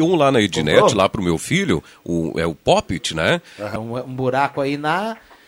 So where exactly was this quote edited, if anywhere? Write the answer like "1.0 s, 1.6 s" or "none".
3.8 s

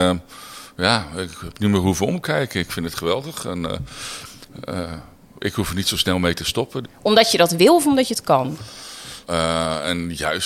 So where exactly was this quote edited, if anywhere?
6.8 s, 9.2 s

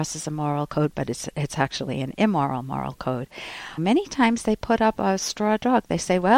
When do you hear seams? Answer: 3.8 s

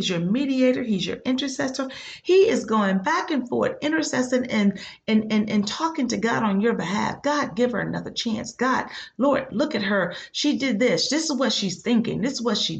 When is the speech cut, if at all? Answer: none

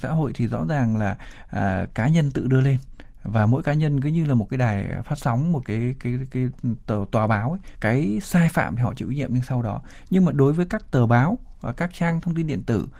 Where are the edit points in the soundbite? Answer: 7.8 s

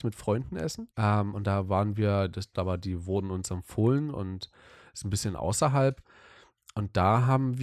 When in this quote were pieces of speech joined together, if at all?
0.9 s, 2.5 s

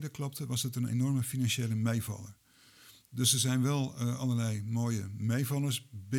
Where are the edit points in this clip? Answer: none

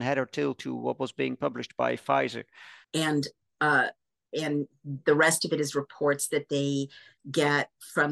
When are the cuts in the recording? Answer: 2.8 s

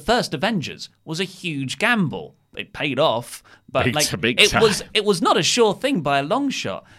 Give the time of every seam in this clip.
none

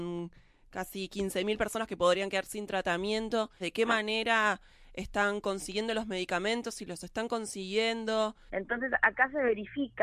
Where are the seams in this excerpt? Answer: 3.6 s, 8.5 s

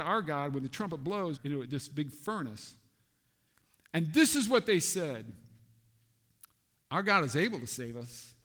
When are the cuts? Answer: 1.4 s

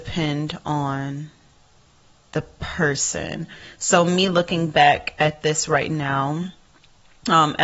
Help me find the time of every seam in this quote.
none

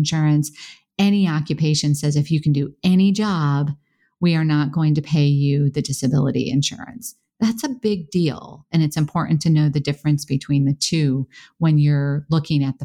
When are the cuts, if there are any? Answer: none

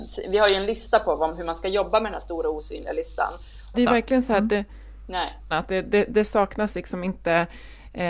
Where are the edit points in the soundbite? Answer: 3.7 s, 5.5 s

